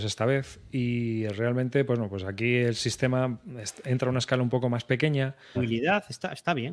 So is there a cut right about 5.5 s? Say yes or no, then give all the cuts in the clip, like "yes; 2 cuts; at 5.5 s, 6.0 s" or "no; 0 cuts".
yes; 1 cut; at 5.5 s